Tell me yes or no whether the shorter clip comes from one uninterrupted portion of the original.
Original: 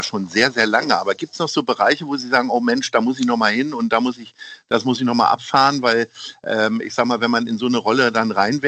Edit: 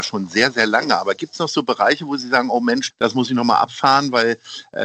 no